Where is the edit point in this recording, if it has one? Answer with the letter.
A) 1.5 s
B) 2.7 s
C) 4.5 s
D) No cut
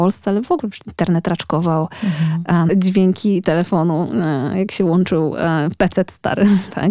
B